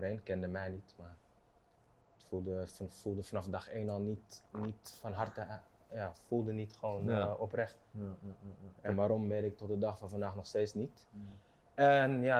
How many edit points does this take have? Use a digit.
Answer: 0